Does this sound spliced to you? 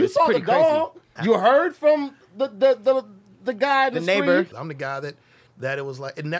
yes; 2 cuts; at 1.2 s, 4.5 s

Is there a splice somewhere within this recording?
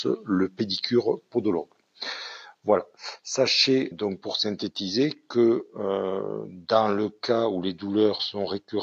yes; 1 cut; at 3.9 s

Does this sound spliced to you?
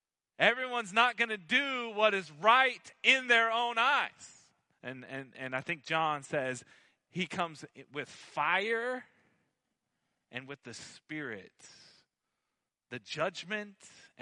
yes; 1 cut; at 4.7 s

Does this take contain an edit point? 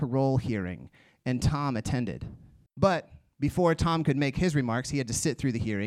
yes; 1 cut; at 2.7 s

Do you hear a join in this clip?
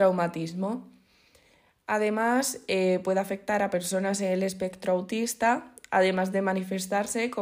no; 0 cuts

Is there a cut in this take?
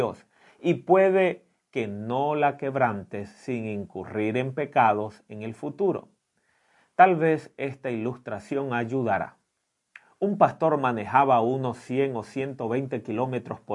no; 0 cuts

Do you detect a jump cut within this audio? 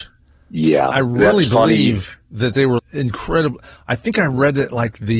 yes; 2 cuts; at 0.9 s, 2.8 s

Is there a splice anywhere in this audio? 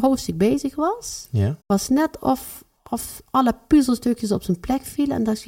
yes; 1 cut; at 1.6 s

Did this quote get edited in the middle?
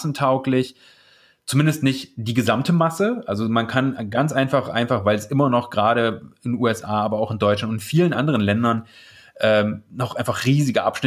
no; 0 cuts

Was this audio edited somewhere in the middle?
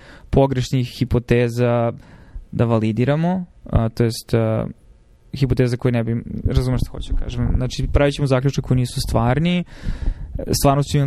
no; 0 cuts

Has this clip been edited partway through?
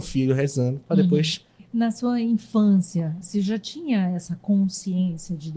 yes; 2 cuts; at 1.6 s, 3.2 s

